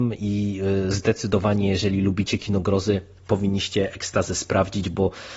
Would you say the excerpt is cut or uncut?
uncut